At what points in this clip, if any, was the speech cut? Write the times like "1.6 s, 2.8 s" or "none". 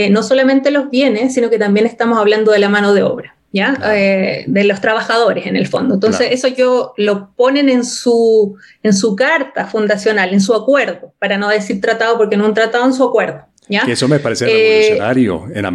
none